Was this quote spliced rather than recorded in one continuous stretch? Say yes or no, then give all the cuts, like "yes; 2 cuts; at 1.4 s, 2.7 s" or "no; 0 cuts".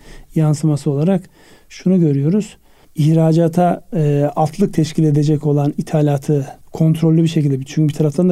yes; 2 cuts; at 2.8 s, 6.6 s